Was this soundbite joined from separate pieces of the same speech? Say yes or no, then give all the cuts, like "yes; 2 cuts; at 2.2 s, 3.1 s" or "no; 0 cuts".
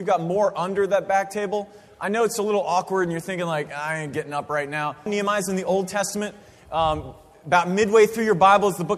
yes; 1 cut; at 5.1 s